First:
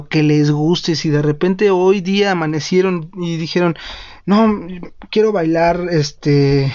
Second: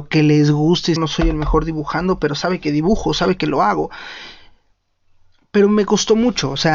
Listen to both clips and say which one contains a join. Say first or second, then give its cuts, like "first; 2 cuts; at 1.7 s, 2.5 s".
second; 1 cut; at 1.0 s